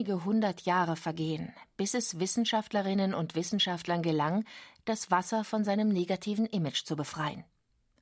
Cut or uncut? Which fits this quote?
uncut